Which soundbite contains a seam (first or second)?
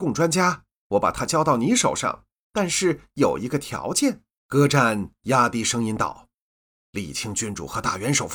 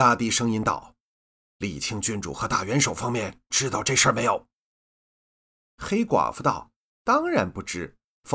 first